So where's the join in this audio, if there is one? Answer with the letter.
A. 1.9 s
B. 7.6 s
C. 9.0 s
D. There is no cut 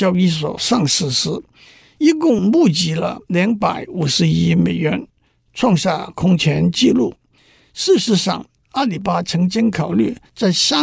C